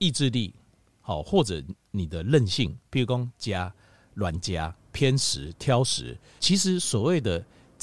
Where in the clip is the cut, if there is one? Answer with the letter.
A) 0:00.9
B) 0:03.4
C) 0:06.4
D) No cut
C